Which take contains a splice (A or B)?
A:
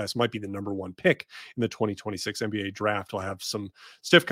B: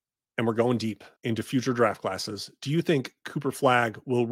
B